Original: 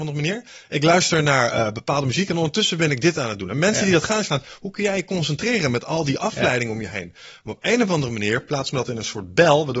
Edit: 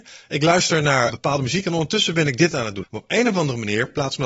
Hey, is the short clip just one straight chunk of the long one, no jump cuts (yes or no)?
no